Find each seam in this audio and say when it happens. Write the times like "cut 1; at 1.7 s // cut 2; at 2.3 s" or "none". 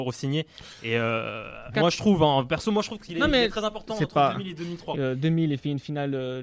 cut 1; at 1.7 s // cut 2; at 4.9 s